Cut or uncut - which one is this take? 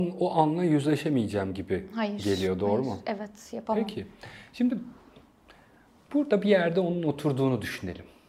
uncut